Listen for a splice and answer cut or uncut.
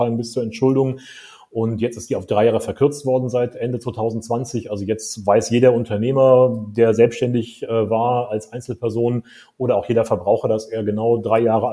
uncut